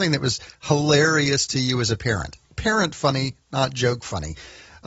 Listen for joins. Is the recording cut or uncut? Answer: uncut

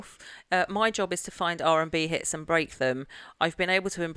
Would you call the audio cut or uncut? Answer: uncut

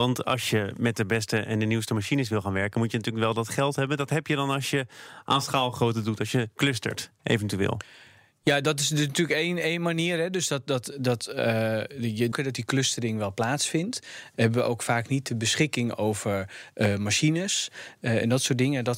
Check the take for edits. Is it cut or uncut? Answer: cut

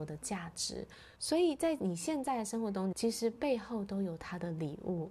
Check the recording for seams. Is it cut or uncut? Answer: cut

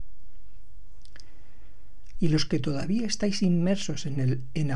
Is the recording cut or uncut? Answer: cut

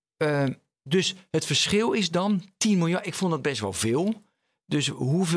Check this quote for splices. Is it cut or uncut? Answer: uncut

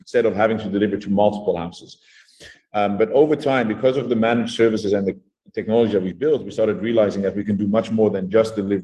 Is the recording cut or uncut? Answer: uncut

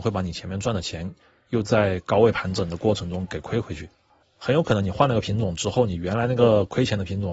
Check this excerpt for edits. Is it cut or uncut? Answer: cut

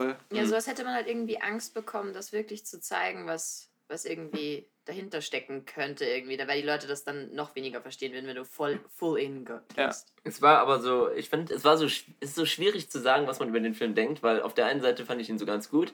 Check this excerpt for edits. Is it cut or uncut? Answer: uncut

